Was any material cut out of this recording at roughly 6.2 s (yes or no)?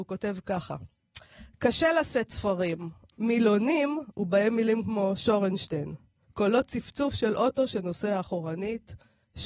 no